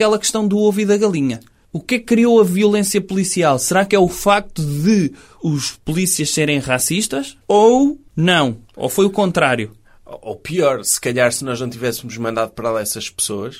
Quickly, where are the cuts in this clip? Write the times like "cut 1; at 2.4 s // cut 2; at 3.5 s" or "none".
cut 1; at 5.4 s